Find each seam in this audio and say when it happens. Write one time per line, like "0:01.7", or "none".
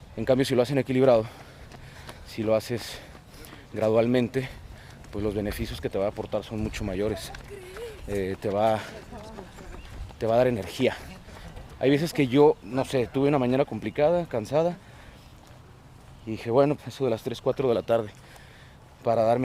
0:12.6
0:16.8